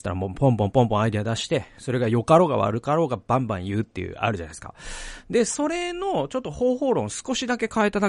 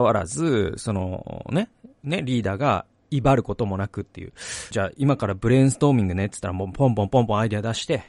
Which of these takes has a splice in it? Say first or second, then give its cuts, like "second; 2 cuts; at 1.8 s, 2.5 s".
second; 2 cuts; at 1.9 s, 4.7 s